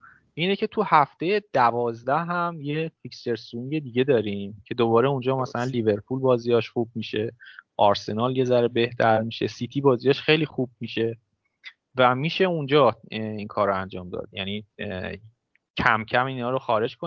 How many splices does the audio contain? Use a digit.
0